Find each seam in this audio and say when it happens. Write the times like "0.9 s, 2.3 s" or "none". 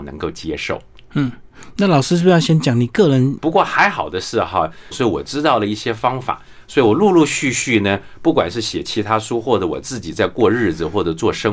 3.4 s, 4.9 s